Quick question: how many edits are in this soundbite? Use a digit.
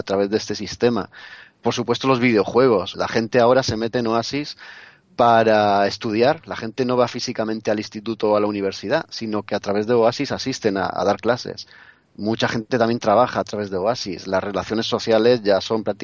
1